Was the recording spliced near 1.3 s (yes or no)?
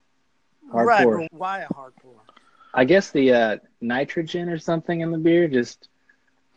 yes